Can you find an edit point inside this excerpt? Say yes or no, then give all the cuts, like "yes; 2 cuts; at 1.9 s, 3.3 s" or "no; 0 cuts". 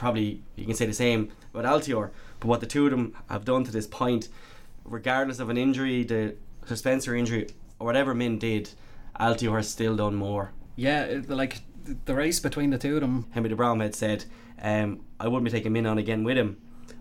yes; 2 cuts; at 10.7 s, 13.2 s